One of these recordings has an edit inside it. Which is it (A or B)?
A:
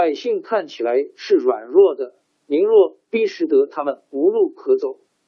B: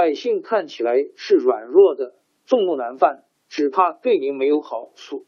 B